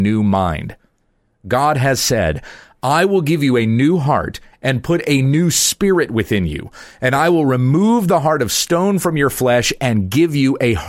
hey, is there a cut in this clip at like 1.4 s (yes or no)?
no